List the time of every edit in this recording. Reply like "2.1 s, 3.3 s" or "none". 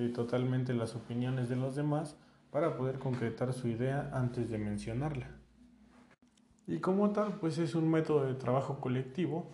none